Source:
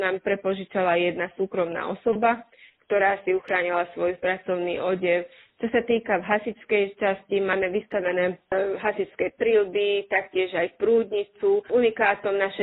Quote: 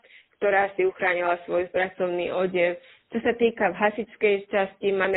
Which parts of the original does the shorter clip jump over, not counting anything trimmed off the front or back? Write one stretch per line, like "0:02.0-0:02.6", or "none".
none